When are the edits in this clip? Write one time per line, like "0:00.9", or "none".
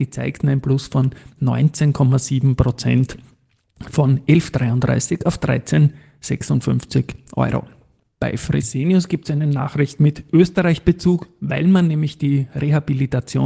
none